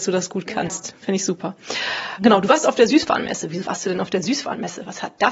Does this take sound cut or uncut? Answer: uncut